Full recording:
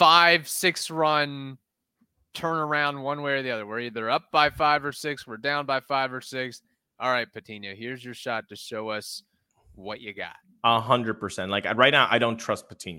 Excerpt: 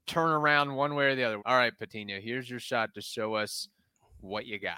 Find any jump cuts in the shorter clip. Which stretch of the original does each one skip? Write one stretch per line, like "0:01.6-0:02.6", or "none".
0:03.7-0:06.9